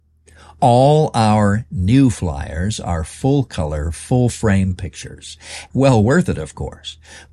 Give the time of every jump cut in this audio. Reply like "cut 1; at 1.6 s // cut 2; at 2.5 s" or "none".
cut 1; at 5.7 s